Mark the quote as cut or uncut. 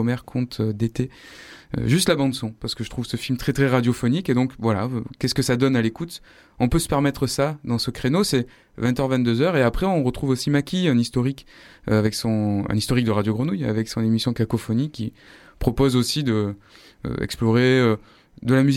uncut